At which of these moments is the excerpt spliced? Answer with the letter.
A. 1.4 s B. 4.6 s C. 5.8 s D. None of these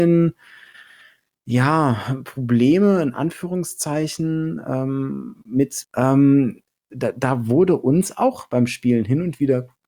C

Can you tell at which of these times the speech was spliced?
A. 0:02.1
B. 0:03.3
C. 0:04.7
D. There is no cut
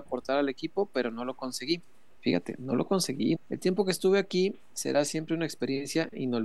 B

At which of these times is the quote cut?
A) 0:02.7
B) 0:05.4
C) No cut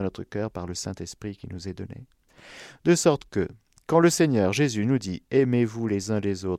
C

